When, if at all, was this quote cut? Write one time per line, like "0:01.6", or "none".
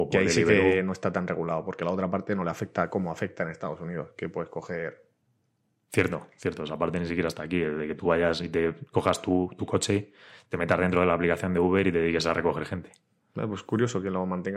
none